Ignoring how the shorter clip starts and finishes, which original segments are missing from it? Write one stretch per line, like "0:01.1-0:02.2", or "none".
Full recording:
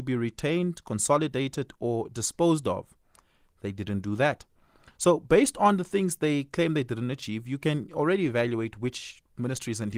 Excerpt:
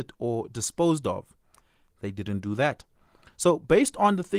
none